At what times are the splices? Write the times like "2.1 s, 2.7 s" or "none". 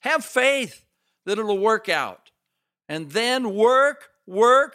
none